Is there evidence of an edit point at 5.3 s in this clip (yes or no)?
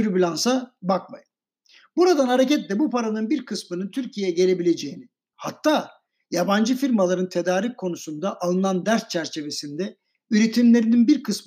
yes